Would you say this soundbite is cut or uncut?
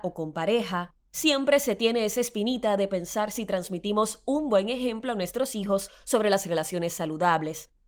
uncut